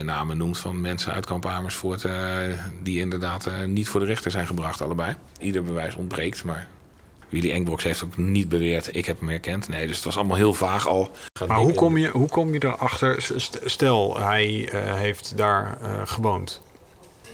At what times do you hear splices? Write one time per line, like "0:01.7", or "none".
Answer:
0:05.4
0:08.9